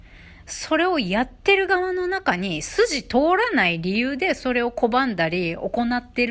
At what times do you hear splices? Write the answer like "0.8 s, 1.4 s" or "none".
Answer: none